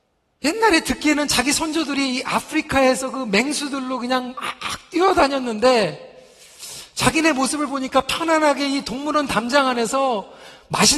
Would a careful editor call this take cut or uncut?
uncut